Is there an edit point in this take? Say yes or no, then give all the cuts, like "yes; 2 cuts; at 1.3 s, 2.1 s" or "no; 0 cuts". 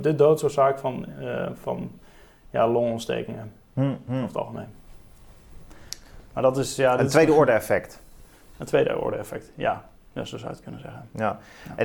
no; 0 cuts